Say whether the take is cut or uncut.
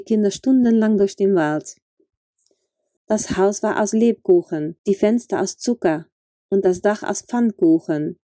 cut